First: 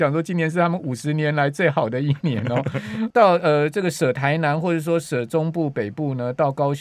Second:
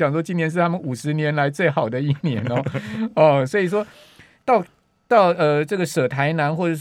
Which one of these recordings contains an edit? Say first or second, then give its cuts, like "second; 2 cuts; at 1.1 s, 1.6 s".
first; 1 cut; at 3.1 s